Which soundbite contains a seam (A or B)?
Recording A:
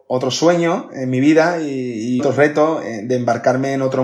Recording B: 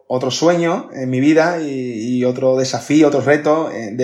A